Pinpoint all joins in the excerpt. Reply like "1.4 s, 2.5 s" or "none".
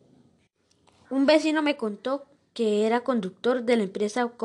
none

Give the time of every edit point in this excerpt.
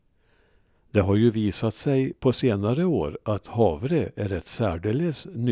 3.4 s

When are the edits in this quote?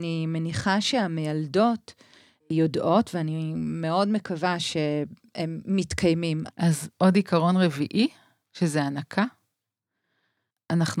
6.5 s

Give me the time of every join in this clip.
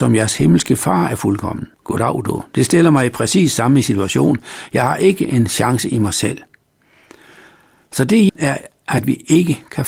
1.7 s, 8.3 s

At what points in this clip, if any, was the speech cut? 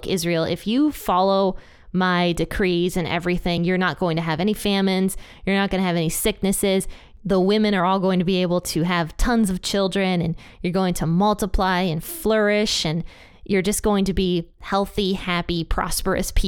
none

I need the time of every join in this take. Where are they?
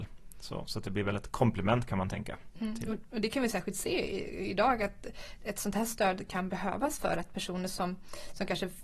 none

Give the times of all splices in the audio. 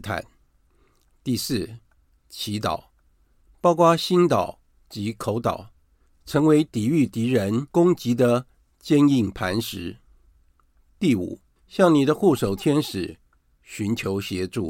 1.2 s, 11.6 s

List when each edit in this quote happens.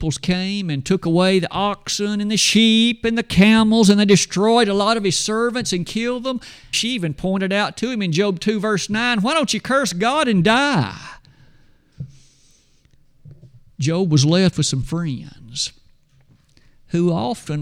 6.7 s

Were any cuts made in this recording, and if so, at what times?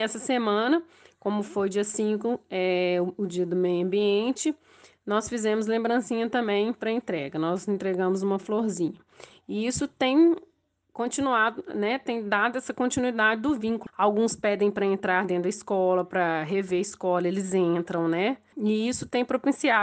13.9 s, 18.5 s

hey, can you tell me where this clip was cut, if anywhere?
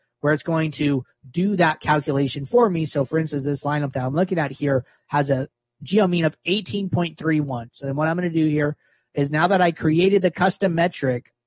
7.7 s

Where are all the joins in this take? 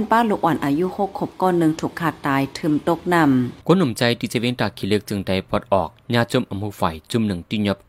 3.6 s

